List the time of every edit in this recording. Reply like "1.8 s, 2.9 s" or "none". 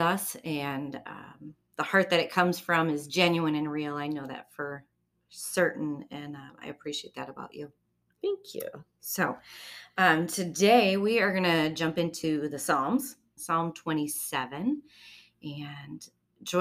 13.4 s